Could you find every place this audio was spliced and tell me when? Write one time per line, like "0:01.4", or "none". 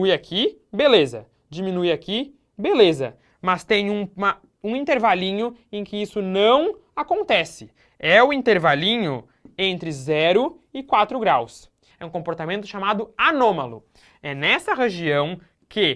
0:11.9